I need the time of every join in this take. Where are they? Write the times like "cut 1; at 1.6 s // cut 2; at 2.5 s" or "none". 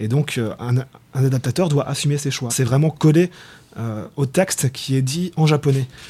cut 1; at 2.5 s